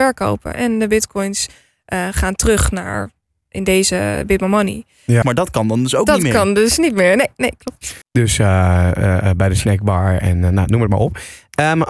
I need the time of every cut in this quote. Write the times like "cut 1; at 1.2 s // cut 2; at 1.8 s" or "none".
cut 1; at 5.2 s // cut 2; at 8.0 s